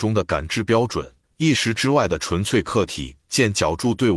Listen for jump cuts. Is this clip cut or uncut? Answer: cut